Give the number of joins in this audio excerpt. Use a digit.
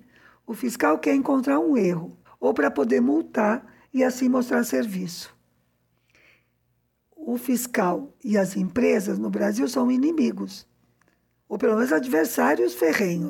1